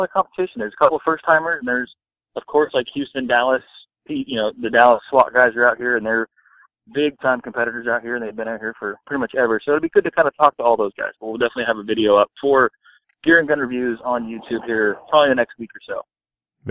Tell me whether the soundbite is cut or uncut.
uncut